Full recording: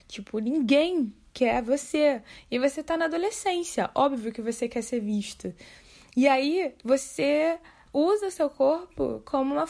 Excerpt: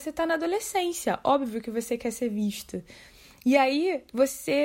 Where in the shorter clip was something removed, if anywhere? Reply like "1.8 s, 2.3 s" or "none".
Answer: none